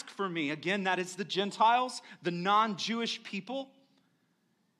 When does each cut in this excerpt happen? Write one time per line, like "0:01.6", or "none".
none